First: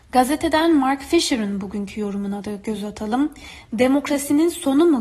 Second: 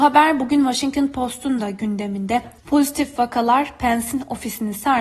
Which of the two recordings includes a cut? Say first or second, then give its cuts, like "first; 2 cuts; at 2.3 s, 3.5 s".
second; 1 cut; at 2.6 s